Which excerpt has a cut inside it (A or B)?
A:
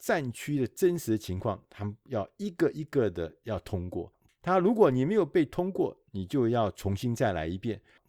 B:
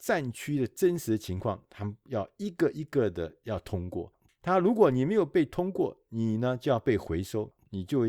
A